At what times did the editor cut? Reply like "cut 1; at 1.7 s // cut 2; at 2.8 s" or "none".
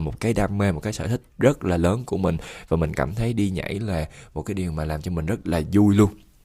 cut 1; at 1.3 s